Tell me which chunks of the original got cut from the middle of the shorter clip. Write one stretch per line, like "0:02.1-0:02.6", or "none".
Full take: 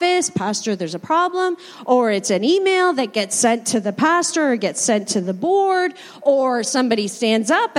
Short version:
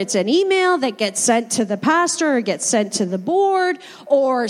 none